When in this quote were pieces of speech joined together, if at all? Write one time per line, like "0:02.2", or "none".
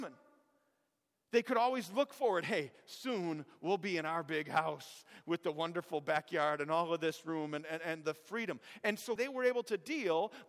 0:09.2